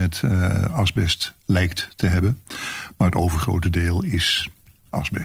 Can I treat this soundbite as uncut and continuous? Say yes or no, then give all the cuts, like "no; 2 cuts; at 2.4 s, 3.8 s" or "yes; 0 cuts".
yes; 0 cuts